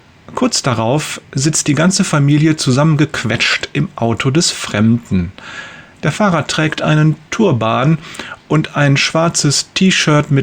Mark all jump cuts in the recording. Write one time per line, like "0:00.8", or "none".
none